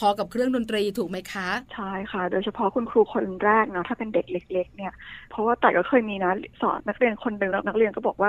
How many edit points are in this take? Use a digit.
2